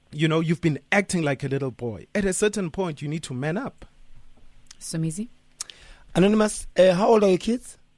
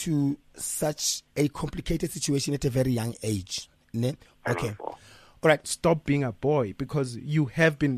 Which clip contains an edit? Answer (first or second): second